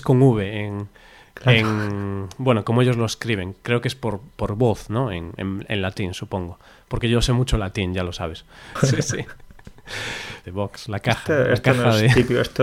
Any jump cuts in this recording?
yes; 2 cuts; at 8.8 s, 10.4 s

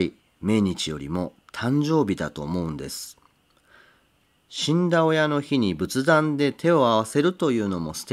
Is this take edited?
no; 0 cuts

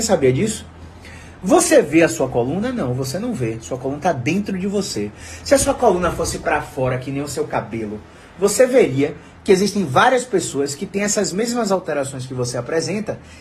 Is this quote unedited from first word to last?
yes; 0 cuts

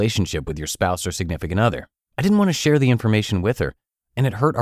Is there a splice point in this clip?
yes; 1 cut; at 2.1 s

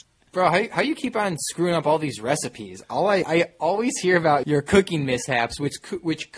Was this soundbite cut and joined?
yes; 2 cuts; at 3.2 s, 4.4 s

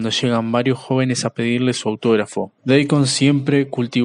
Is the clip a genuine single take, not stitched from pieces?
no; 1 cut; at 2.6 s

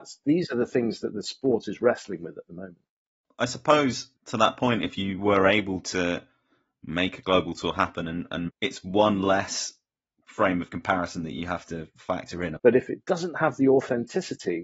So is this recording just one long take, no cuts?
no; 3 cuts; at 4.1 s, 8.5 s, 12.6 s

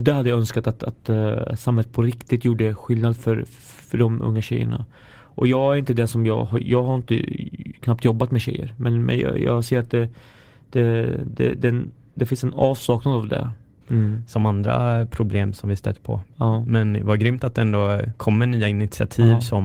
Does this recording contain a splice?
yes; 1 cut; at 13.8 s

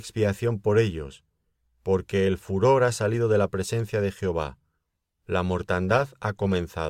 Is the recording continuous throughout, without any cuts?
yes; 0 cuts

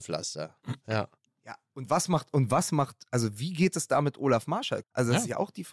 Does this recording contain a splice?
yes; 1 cut; at 4.8 s

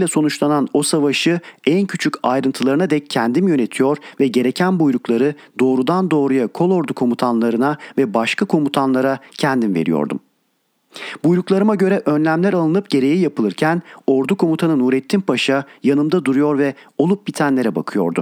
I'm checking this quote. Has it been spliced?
no; 0 cuts

